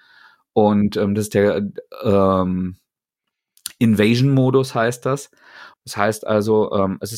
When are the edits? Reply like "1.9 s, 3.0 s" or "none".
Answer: 5.7 s